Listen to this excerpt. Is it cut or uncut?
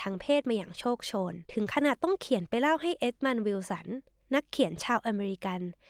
cut